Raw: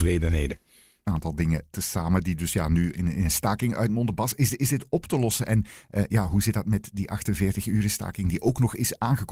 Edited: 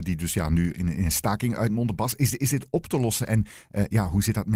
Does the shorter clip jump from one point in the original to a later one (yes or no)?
no